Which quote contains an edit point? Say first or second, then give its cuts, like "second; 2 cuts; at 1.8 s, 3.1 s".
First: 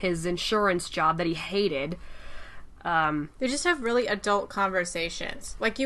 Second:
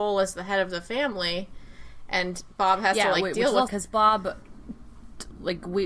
second; 1 cut; at 3.7 s